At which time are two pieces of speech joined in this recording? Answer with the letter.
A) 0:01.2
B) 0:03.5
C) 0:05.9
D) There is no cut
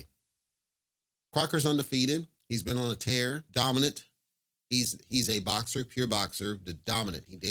B